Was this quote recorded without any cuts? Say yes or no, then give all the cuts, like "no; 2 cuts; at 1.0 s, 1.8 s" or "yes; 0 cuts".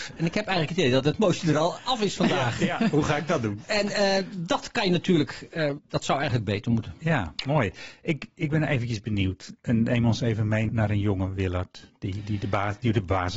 no; 2 cuts; at 5.8 s, 10.7 s